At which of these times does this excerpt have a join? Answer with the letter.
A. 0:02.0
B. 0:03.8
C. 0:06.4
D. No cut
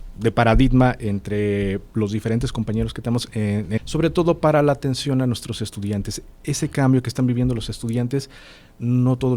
B